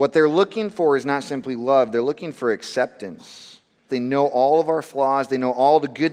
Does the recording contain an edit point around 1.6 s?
no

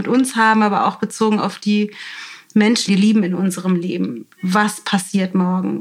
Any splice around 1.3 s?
no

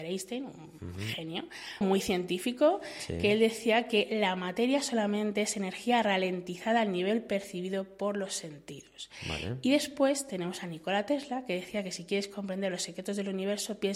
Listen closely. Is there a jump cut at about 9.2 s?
no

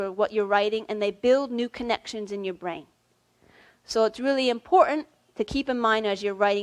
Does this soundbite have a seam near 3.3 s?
no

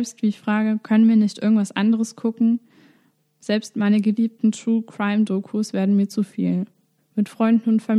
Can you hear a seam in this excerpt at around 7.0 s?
yes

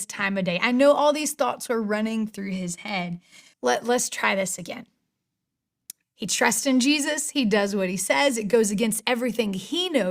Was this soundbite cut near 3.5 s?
yes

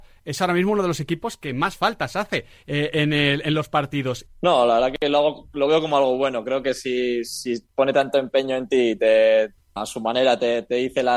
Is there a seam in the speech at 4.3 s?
yes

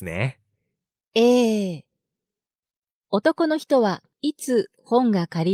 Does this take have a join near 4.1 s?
yes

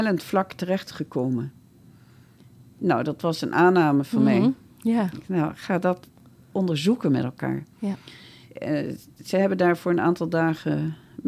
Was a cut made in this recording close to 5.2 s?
no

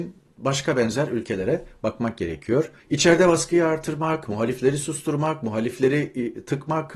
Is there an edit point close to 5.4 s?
no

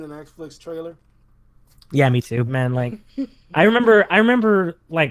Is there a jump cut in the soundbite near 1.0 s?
no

